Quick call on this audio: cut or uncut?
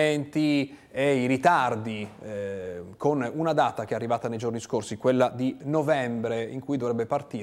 uncut